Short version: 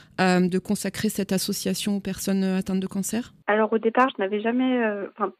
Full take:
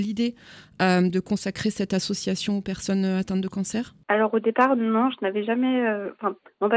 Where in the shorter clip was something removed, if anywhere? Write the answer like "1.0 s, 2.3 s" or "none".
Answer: 4.1 s